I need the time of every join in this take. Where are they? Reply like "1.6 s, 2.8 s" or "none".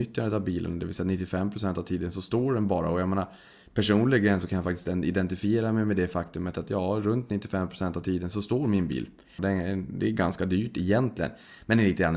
9.4 s